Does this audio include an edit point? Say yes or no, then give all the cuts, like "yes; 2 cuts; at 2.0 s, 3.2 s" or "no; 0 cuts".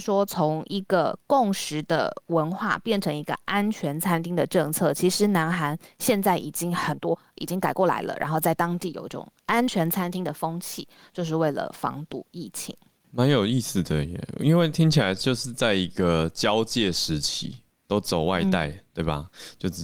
yes; 1 cut; at 17.8 s